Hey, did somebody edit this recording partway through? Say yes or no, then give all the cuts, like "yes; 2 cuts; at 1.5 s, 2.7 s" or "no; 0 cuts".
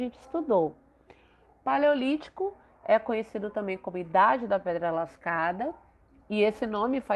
no; 0 cuts